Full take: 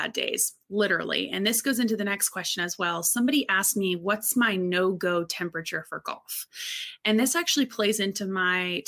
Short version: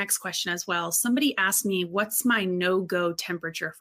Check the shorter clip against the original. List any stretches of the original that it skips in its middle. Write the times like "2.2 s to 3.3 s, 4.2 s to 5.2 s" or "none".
none

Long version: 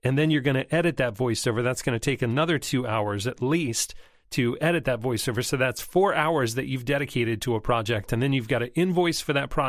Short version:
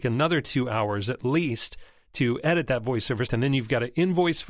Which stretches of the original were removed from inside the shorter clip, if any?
5.4 s to 8.1 s

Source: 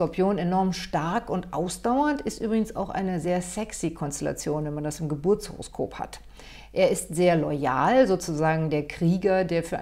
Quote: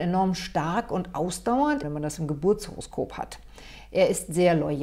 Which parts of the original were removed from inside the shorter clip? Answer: 2.2 s to 4.6 s

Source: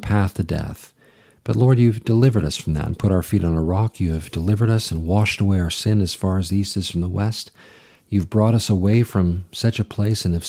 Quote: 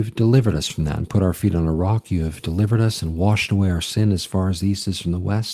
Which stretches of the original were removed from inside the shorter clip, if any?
none

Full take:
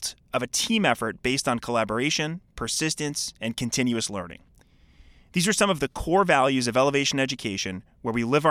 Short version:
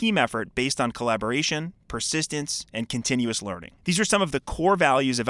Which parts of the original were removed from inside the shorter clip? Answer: 4.4 s to 5.3 s

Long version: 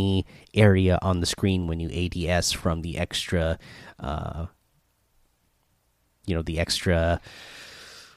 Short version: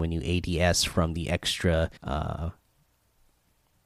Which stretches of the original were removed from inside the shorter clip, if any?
3.6 s to 3.9 s

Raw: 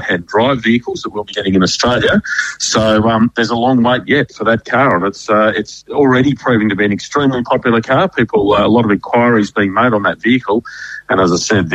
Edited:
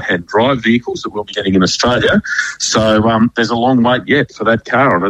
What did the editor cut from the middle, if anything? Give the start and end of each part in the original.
none

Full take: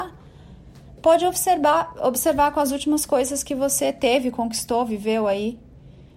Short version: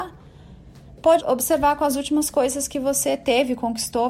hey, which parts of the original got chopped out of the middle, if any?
1.2 s to 1.9 s

